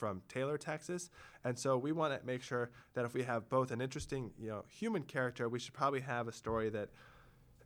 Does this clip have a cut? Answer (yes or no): no